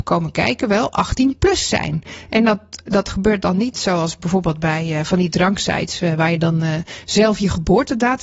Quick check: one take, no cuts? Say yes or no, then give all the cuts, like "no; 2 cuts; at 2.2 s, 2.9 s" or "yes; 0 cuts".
yes; 0 cuts